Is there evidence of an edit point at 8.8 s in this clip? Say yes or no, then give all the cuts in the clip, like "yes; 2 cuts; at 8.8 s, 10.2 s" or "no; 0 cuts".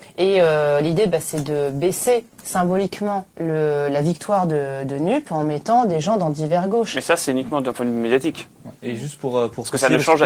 no; 1 cut; at 3.3 s